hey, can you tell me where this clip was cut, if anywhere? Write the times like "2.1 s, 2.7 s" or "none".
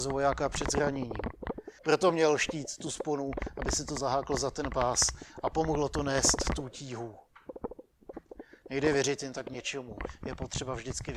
1.8 s